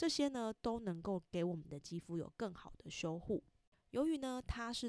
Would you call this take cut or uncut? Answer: cut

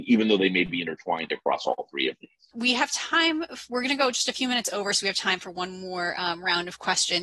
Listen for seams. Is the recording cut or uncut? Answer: cut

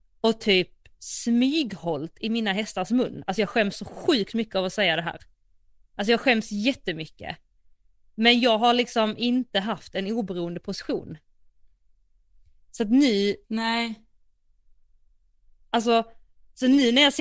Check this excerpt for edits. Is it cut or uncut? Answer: uncut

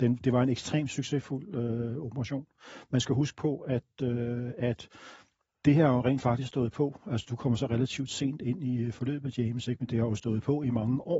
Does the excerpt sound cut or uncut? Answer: uncut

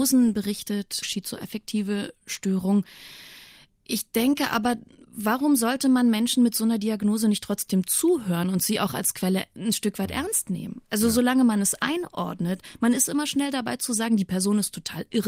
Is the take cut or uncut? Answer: cut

